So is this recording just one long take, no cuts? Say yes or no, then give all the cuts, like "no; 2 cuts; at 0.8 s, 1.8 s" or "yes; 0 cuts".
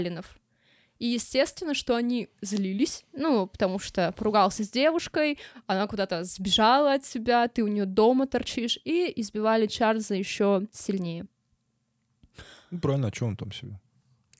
yes; 0 cuts